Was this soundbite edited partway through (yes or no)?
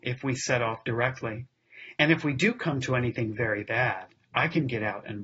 no